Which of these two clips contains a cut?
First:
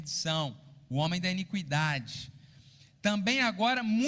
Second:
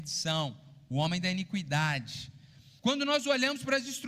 second; 1 cut; at 2.8 s

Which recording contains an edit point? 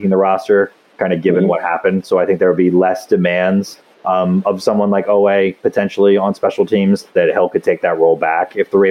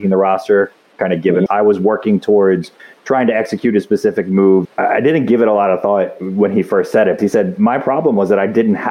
second; 3 cuts; at 1.5 s, 4.6 s, 7.2 s

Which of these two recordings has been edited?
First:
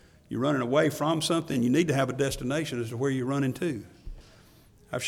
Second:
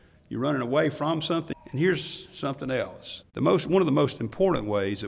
second; 2 cuts; at 1.5 s, 3.2 s

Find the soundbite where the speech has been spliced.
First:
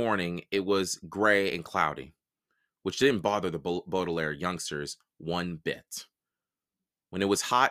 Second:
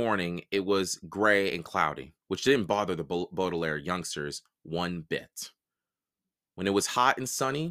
second; 1 cut; at 2.2 s

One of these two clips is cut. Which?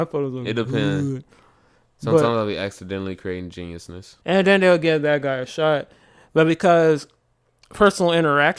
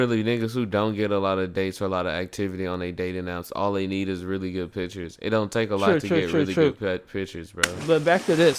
first; 1 cut; at 4.2 s

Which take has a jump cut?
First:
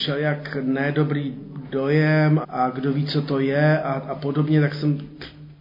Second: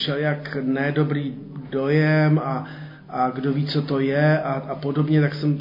first; 1 cut; at 2.4 s

